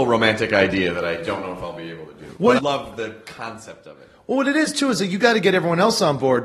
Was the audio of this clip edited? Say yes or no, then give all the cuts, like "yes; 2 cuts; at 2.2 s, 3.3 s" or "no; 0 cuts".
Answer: yes; 1 cut; at 2.6 s